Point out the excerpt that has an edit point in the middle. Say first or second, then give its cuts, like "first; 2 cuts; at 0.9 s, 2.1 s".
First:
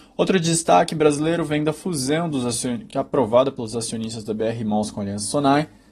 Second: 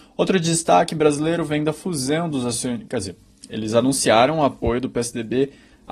second; 1 cut; at 2.9 s